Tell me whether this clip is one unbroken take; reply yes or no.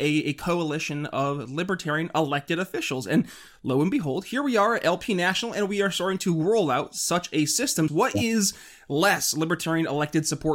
no